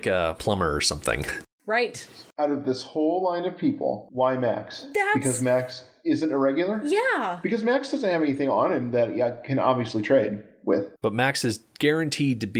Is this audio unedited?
yes; 0 cuts

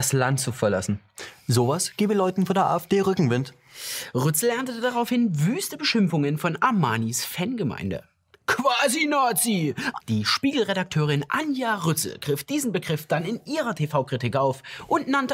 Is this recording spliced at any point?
yes; 1 cut; at 10.0 s

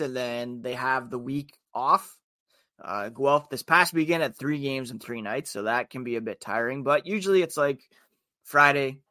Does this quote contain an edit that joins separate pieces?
no; 0 cuts

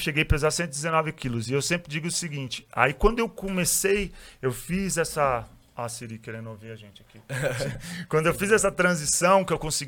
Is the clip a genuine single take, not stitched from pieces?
yes; 0 cuts

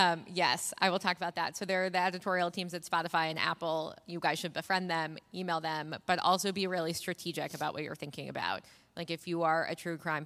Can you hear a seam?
no; 0 cuts

